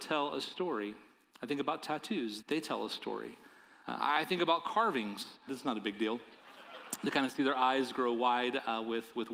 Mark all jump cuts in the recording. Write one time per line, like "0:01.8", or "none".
0:02.4
0:03.8
0:05.5